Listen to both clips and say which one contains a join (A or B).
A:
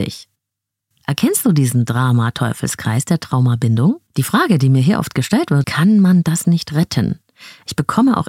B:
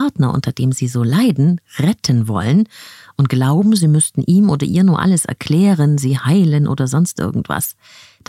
A